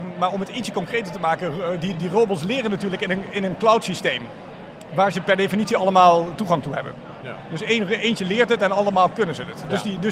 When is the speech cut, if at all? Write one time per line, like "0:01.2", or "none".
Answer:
none